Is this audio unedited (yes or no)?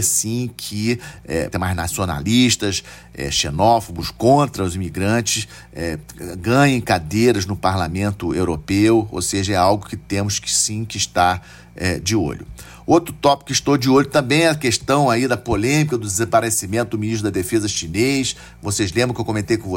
no